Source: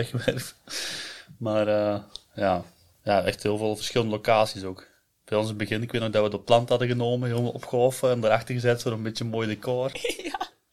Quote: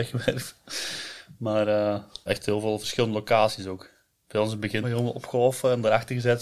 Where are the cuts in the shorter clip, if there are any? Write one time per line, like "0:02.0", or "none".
0:02.3
0:04.8